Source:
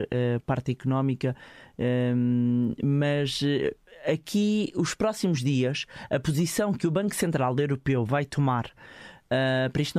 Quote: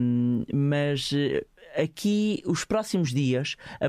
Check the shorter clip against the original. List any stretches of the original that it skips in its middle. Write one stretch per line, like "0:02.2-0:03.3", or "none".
none